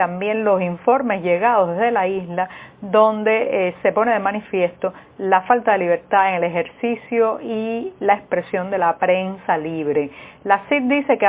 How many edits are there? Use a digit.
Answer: 0